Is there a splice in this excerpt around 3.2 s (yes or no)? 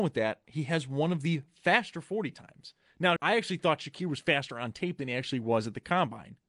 yes